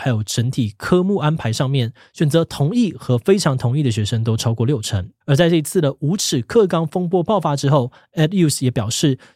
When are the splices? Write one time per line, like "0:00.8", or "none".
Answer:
0:05.2